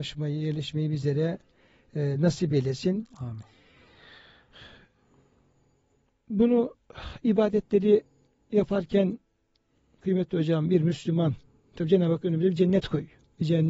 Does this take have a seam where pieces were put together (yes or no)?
no